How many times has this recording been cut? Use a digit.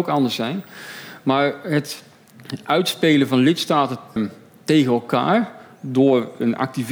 1